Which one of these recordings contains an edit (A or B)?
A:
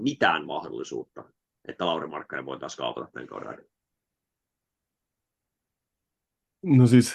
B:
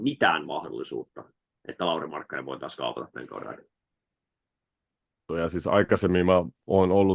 B